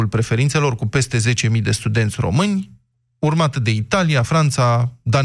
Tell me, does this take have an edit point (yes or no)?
no